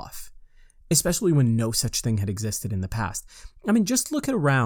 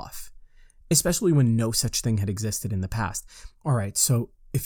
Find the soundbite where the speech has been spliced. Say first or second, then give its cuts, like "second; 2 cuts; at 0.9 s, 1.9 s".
second; 1 cut; at 3.6 s